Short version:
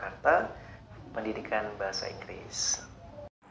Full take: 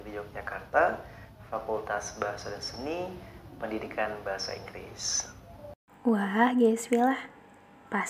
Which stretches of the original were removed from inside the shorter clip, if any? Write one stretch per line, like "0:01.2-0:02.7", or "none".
0:01.5-0:03.4